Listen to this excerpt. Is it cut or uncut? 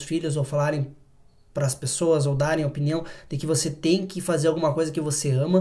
uncut